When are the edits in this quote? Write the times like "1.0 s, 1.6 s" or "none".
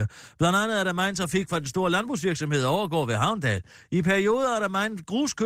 none